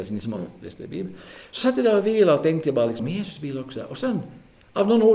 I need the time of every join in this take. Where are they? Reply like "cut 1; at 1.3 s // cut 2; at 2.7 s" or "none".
cut 1; at 3.0 s